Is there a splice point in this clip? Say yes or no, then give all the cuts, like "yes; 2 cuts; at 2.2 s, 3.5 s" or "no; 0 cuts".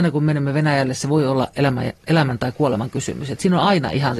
no; 0 cuts